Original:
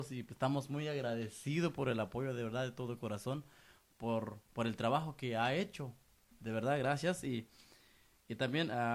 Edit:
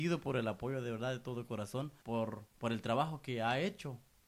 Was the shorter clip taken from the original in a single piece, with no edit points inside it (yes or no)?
no